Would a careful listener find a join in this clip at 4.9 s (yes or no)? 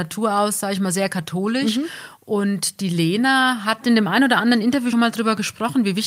yes